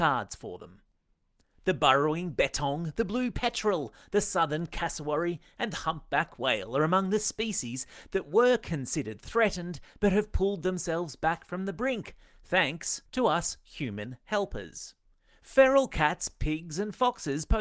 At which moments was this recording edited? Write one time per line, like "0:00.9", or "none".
0:13.1